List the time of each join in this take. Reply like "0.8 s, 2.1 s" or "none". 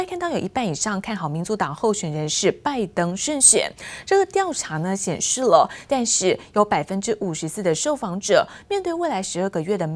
5.9 s